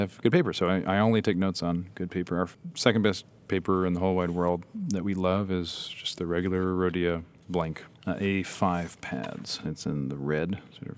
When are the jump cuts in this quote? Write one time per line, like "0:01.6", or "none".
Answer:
0:09.6